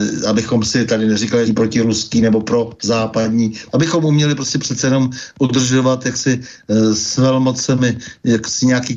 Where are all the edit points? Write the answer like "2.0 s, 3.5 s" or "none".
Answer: 1.4 s, 3.7 s